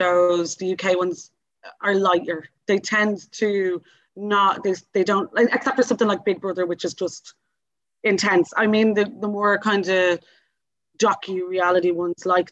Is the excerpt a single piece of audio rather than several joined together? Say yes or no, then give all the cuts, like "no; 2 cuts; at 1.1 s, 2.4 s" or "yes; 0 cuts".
yes; 0 cuts